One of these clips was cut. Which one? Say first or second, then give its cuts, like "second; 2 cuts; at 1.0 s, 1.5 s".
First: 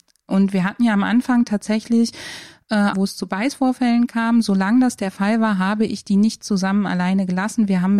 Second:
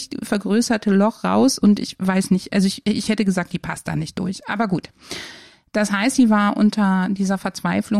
first; 1 cut; at 2.9 s